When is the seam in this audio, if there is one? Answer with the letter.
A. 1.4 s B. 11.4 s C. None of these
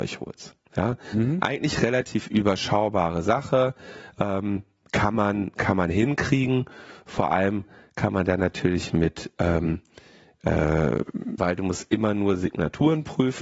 B